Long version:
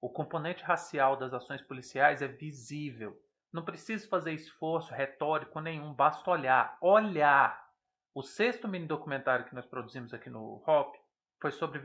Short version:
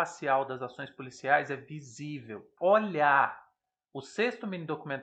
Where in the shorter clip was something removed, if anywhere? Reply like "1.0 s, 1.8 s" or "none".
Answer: 2.6 s